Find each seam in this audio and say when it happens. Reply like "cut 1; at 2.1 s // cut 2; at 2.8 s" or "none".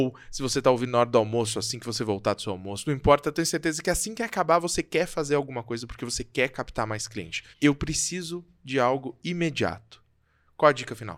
cut 1; at 7.5 s